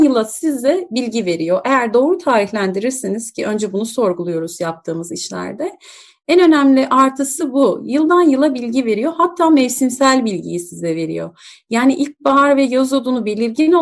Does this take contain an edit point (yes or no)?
no